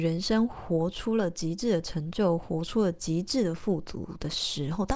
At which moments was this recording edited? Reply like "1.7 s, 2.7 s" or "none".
none